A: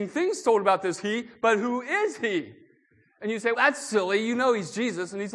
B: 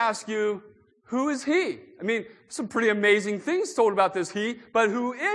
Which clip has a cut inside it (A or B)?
A